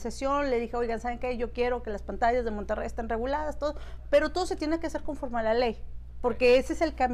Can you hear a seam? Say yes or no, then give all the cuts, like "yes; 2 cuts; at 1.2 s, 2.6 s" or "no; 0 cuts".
no; 0 cuts